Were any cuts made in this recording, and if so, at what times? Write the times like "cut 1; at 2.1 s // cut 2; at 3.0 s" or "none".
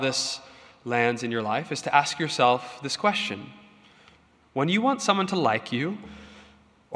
none